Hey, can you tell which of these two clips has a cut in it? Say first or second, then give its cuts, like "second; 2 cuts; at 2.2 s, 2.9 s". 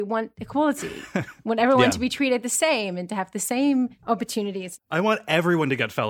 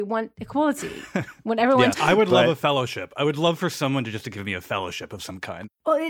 second; 1 cut; at 1.9 s